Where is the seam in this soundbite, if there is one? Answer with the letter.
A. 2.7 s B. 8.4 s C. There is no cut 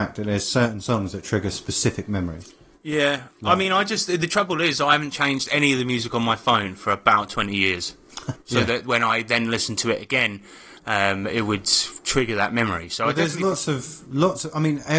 B